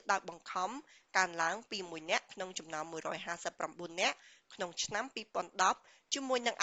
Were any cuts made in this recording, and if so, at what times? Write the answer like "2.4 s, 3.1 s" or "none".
none

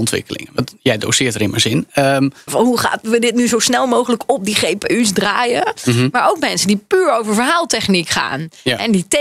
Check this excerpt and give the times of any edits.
2.5 s

